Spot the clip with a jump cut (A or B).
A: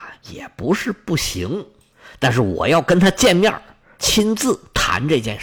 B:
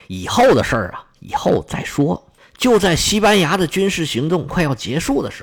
B